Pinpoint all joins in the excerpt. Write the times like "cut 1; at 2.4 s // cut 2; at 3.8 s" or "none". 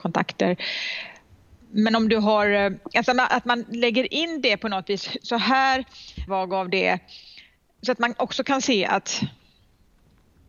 cut 1; at 6.3 s